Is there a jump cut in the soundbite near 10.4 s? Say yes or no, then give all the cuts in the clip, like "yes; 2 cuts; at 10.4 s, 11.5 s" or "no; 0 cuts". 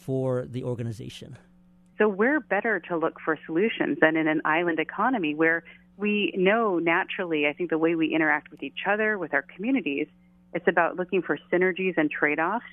no; 1 cut; at 1.9 s